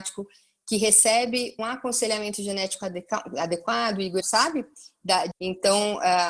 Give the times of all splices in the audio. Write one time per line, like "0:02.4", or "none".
0:01.6
0:04.2
0:05.3

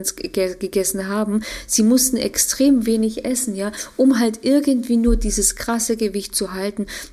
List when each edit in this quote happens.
none

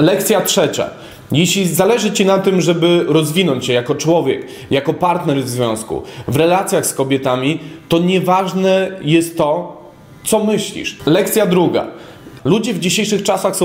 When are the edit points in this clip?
0:11.0
0:12.4

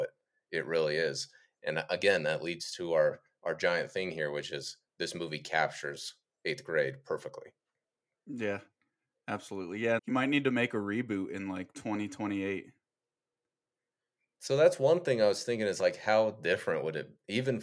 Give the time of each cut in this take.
0:10.0

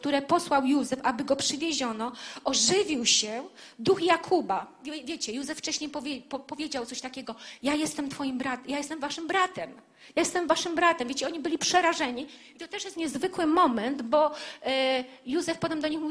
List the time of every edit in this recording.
none

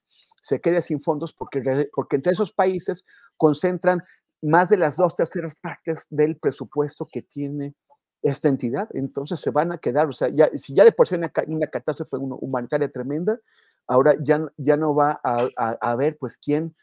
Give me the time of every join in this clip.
0:01.9

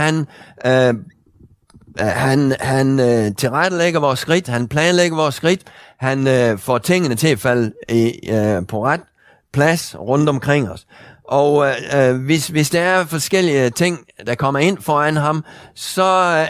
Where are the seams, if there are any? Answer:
none

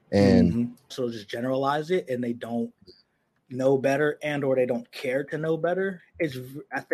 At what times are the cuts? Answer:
0:00.9
0:06.0

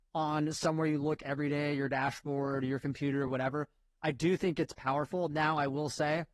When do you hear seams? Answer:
none

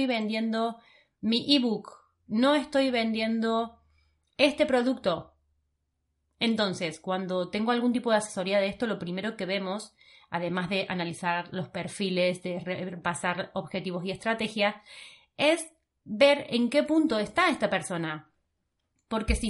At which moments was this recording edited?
none

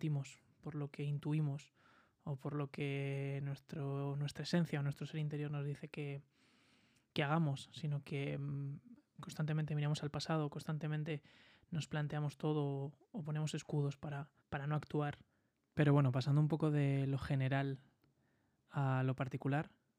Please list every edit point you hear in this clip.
0:14.4

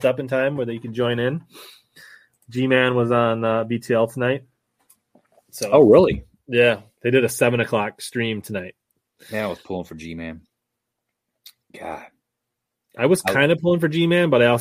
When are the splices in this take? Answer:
none

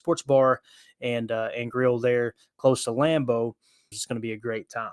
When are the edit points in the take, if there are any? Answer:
0:03.9

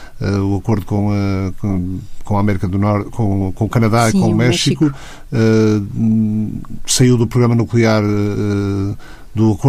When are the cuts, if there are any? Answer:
none

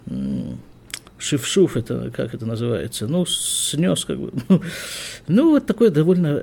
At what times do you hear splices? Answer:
0:01.1

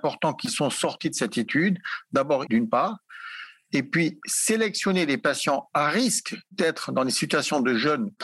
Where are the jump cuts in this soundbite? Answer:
0:02.5

